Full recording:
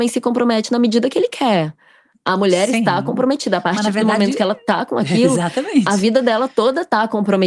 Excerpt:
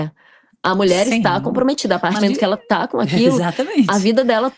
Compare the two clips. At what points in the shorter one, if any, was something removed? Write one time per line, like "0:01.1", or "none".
0:02.2